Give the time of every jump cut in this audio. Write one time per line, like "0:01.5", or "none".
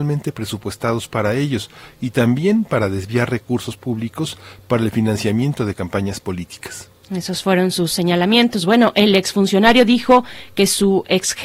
none